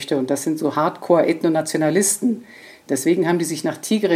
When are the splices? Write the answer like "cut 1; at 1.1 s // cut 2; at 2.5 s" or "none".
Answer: cut 1; at 2.9 s

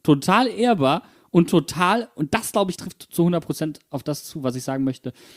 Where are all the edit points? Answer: cut 1; at 2.8 s

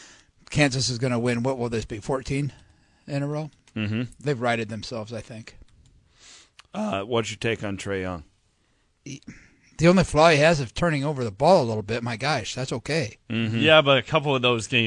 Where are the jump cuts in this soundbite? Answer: cut 1; at 4.2 s // cut 2; at 8.9 s

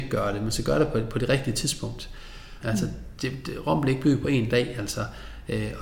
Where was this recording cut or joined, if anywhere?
cut 1; at 2.6 s

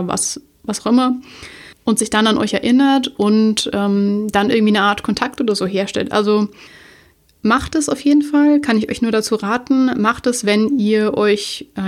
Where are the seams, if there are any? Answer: none

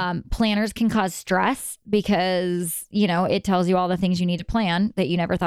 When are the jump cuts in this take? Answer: none

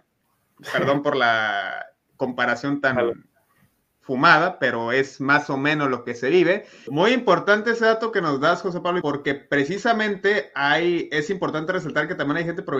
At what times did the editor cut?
cut 1; at 6.9 s // cut 2; at 9.0 s

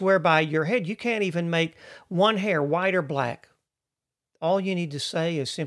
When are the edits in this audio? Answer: none

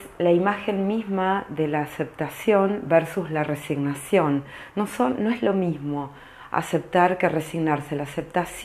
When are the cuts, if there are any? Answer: none

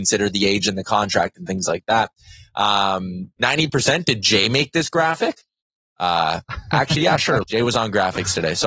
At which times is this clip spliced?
cut 1; at 3.4 s // cut 2; at 7.4 s

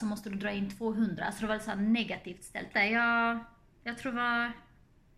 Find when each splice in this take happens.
cut 1; at 2.7 s

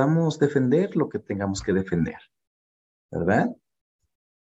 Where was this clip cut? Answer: none

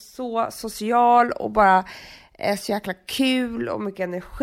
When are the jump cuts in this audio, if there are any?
none

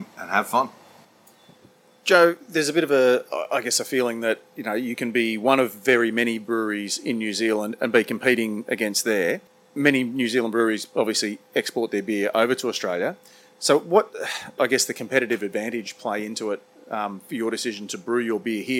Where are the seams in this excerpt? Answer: cut 1; at 14.6 s

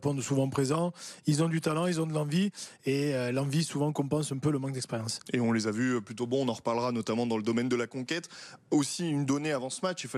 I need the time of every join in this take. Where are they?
none

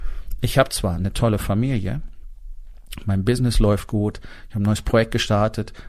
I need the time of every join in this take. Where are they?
cut 1; at 3.0 s

